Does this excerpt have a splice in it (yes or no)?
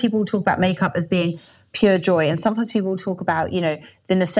no